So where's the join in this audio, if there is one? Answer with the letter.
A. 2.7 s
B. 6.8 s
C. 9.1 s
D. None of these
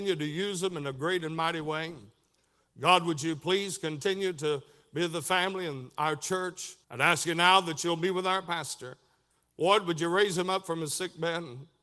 B